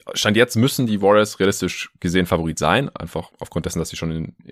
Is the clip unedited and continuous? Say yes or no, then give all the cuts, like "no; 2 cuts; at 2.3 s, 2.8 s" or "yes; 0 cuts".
yes; 0 cuts